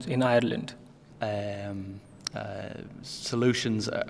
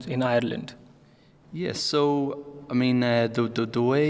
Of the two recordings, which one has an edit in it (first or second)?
first